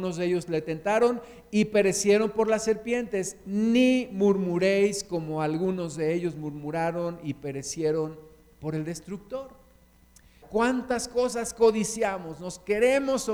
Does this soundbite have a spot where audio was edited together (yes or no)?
yes